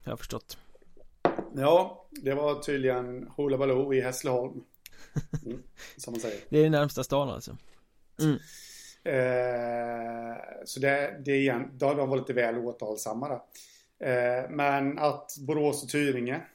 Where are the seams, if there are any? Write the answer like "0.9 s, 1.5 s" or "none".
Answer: 4.9 s, 8.2 s

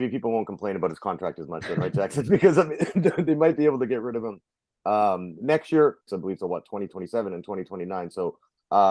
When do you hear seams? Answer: 6.1 s

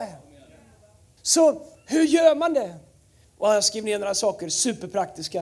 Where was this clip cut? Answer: 1.2 s, 3.2 s

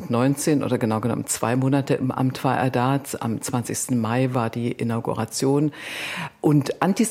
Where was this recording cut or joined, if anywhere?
none

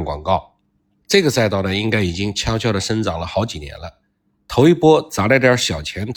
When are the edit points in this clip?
none

